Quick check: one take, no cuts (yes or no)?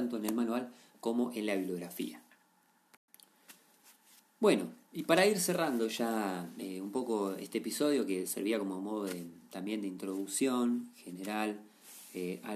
yes